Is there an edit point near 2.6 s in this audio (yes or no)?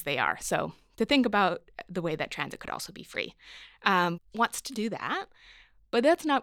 no